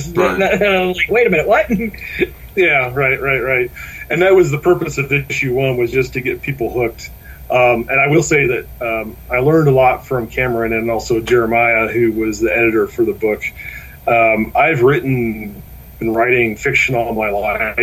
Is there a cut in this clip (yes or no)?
yes